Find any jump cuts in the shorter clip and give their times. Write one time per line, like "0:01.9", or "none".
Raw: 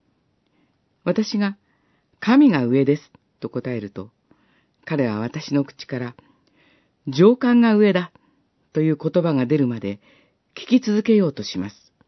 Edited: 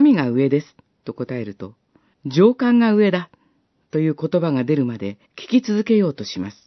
0:02.1
0:05.2